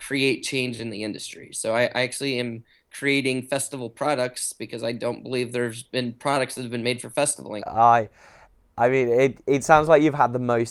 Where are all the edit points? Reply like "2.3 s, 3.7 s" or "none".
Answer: 7.6 s